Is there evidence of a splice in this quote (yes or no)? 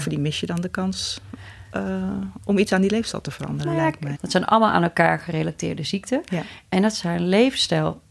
yes